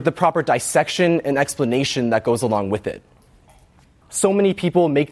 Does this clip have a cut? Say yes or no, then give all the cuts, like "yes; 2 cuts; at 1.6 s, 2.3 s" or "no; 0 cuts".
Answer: yes; 1 cut; at 4.0 s